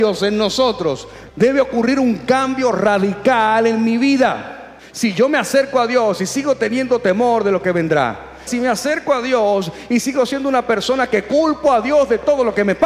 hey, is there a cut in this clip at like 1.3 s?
yes; 2 cuts; at 1.3 s, 8.5 s

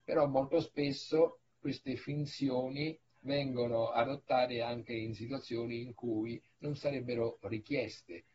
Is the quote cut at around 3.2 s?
yes; 1 cut; at 3.2 s

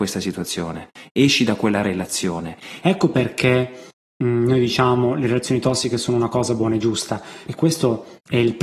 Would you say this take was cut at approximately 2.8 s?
yes; 2 cuts; at 2.8 s, 7.5 s

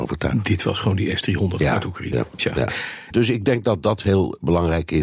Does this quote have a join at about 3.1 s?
yes; 1 cut; at 3.1 s

